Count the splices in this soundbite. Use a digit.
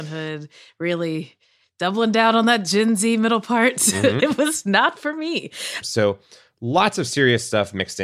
2